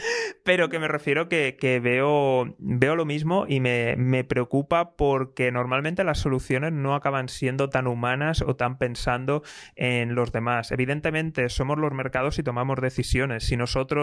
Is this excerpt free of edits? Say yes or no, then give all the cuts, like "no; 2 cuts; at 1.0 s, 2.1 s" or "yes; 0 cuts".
yes; 0 cuts